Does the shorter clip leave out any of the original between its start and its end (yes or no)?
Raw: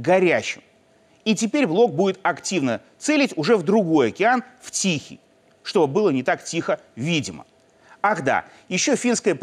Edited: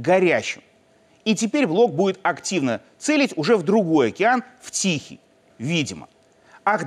yes